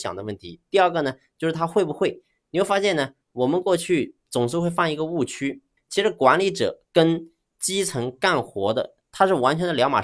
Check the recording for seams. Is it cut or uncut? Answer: cut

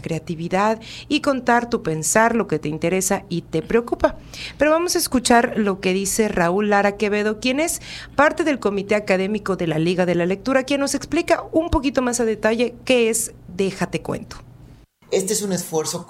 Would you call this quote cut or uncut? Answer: cut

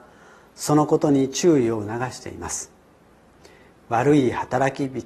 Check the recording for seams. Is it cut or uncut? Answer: uncut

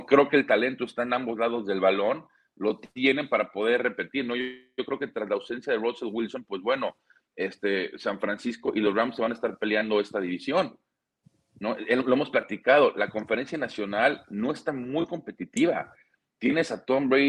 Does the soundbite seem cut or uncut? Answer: uncut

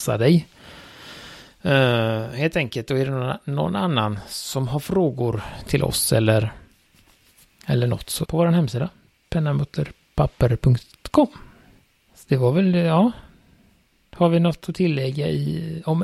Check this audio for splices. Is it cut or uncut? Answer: cut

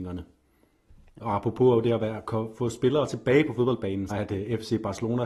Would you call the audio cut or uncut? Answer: cut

